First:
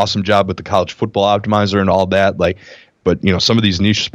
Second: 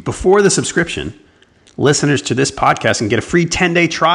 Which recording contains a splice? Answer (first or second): first